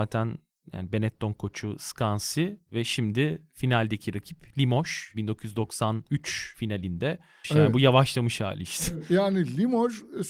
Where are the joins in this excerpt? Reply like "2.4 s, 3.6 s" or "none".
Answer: 7.4 s